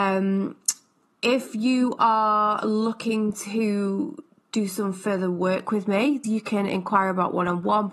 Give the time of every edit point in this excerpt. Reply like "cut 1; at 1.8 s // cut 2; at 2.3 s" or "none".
cut 1; at 6.2 s